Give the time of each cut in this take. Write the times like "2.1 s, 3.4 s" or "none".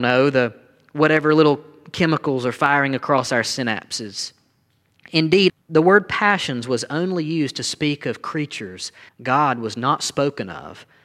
5.5 s, 9.1 s